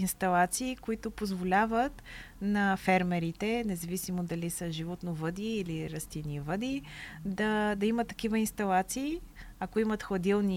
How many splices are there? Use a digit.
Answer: 0